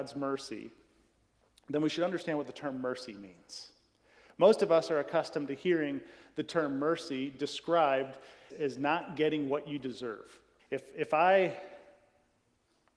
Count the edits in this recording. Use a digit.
2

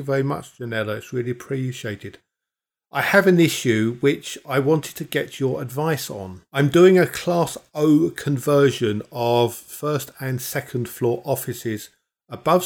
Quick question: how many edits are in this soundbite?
0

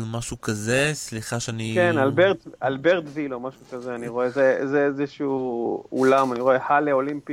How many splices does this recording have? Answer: 0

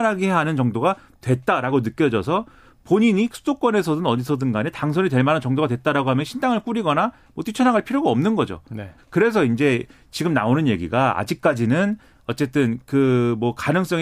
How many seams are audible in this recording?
1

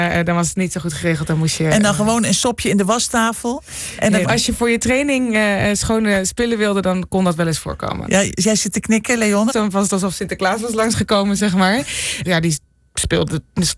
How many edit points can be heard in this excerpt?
3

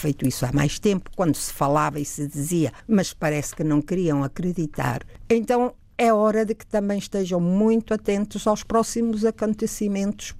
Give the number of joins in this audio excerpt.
0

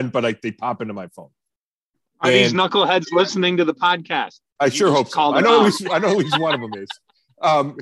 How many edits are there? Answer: 0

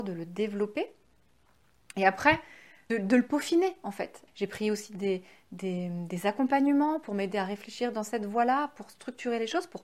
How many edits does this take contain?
2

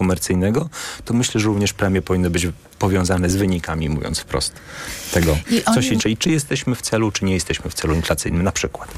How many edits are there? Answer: 1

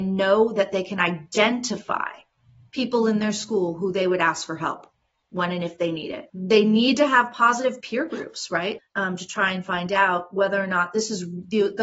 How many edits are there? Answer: 1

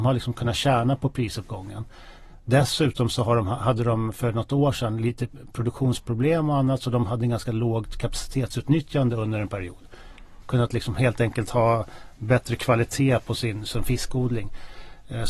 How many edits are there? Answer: 1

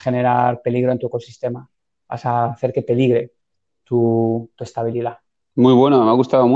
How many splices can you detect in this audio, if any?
1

